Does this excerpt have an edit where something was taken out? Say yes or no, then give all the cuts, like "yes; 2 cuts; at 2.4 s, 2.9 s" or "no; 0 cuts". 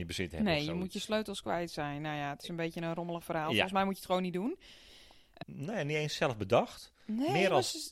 yes; 1 cut; at 5.4 s